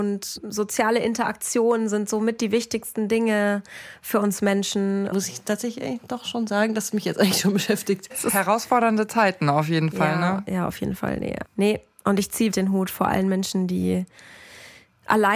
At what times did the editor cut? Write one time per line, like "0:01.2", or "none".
0:05.1
0:11.4
0:12.5